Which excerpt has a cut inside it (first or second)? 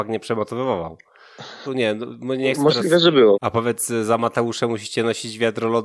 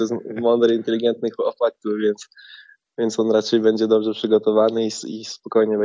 first